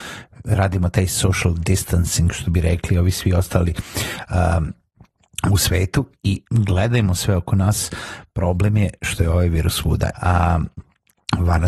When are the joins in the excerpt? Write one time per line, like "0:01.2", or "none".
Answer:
0:06.5
0:10.1